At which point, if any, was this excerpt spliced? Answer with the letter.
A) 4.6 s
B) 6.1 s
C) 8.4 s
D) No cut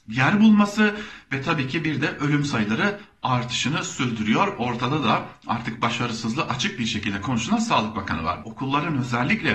C